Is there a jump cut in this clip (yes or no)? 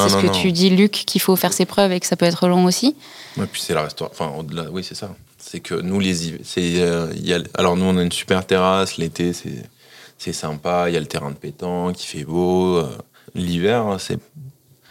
yes